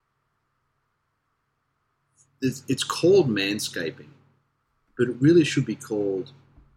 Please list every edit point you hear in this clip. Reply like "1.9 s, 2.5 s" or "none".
none